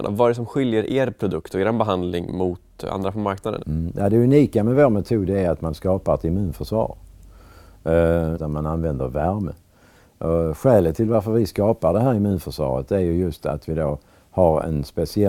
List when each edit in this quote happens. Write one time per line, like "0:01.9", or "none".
0:03.6
0:08.3